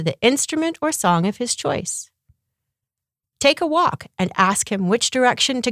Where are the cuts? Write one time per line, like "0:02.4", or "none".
0:03.2

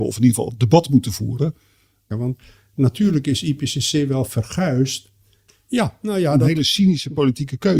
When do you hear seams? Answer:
0:02.1
0:05.5

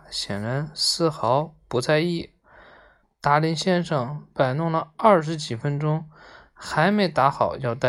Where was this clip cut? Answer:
0:03.0

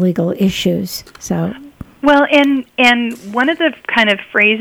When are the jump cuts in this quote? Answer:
none

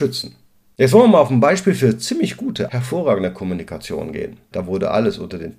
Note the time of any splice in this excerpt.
0:02.7
0:04.5

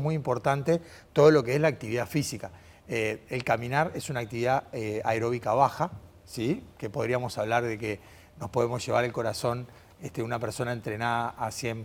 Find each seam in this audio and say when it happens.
none

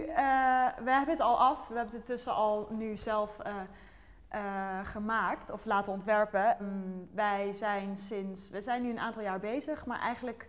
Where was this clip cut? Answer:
0:06.6

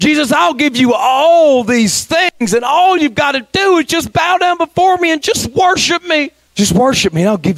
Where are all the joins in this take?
0:06.5

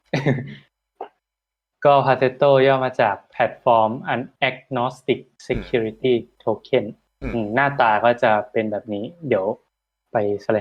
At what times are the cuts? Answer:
0:04.4

